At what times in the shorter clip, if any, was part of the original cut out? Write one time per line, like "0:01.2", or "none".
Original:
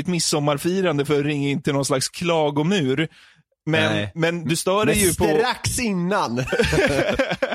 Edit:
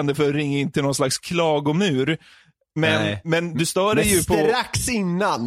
none